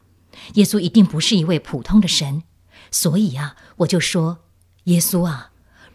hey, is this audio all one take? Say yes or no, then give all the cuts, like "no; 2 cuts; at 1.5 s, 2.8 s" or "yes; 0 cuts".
yes; 0 cuts